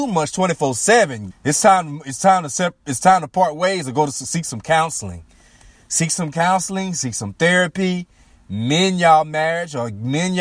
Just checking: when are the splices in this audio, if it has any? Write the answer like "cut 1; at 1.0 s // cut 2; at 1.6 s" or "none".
cut 1; at 1.3 s

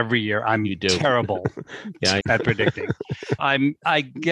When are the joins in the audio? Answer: cut 1; at 2.2 s // cut 2; at 3.4 s

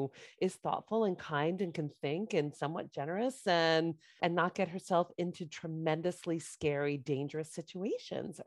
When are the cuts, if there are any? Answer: cut 1; at 4.2 s

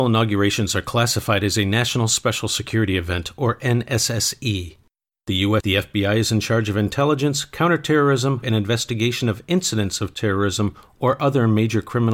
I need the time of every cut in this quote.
cut 1; at 5.6 s // cut 2; at 8.4 s

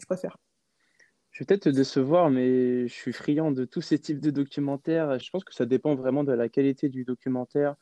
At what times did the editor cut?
cut 1; at 5.2 s

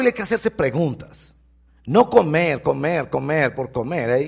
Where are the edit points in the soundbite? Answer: none

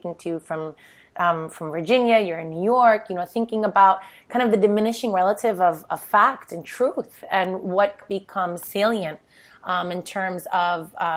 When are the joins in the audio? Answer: none

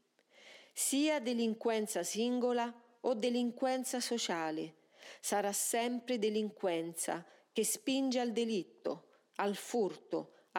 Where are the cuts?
none

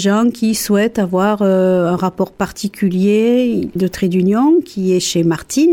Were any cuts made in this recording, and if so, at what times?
cut 1; at 3.8 s

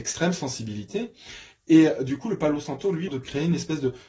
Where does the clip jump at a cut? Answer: cut 1; at 3.1 s

